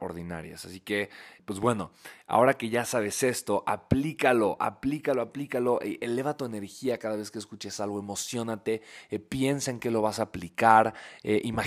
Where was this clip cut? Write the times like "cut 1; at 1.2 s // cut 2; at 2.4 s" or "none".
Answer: cut 1; at 1.4 s